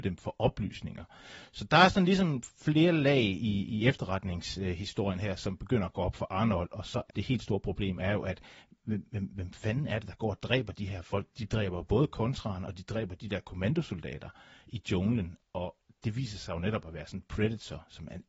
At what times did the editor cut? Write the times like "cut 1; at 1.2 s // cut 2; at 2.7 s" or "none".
cut 1; at 7.1 s